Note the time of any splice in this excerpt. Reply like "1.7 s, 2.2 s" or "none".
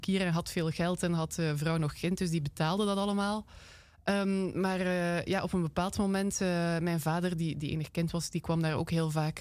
none